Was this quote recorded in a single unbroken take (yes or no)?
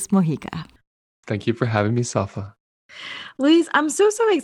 no